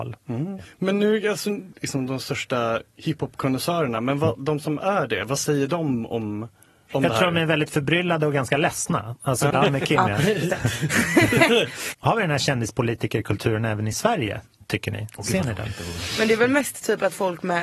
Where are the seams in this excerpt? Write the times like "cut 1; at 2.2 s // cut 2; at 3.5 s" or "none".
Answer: cut 1; at 1.7 s // cut 2; at 9.5 s

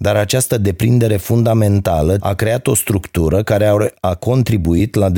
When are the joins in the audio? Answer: cut 1; at 2.2 s

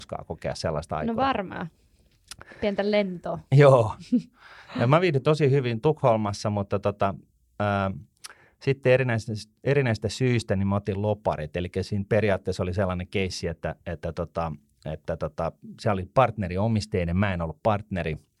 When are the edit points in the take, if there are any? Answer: none

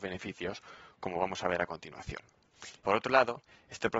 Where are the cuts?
cut 1; at 2.8 s

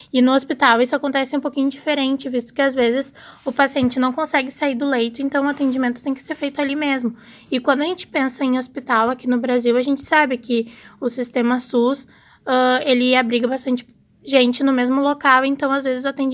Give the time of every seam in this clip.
none

